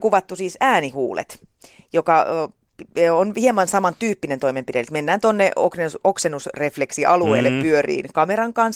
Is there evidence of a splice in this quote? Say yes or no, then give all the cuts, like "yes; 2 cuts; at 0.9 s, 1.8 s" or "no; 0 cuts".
no; 0 cuts